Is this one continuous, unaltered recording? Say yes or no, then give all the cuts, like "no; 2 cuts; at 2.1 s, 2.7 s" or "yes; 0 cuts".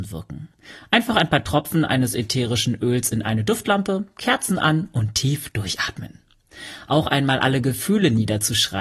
yes; 0 cuts